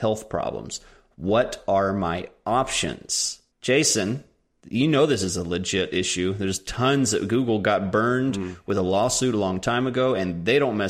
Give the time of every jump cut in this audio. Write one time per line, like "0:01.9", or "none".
0:03.5